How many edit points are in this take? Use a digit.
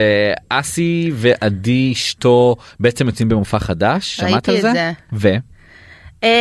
1